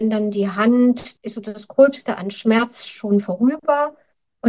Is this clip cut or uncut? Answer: cut